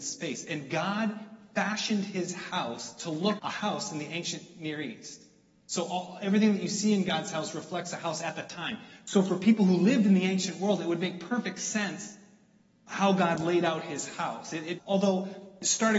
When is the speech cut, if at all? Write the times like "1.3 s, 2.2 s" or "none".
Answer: 3.4 s, 14.8 s